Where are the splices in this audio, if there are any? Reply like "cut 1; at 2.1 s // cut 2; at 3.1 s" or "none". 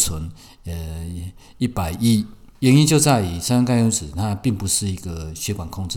cut 1; at 2.5 s